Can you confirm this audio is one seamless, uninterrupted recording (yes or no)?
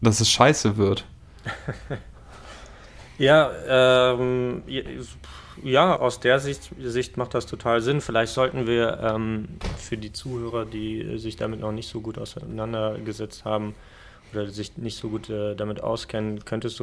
no